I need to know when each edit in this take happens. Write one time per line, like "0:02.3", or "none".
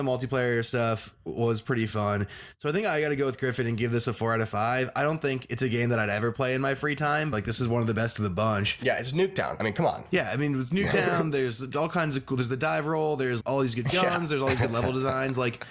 0:07.3
0:13.4